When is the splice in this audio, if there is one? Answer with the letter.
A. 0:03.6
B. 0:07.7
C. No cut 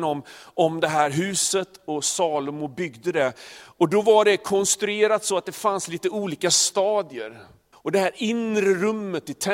B